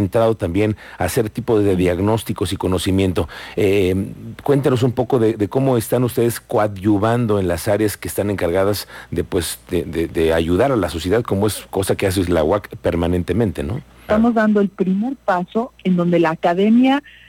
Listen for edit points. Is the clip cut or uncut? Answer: cut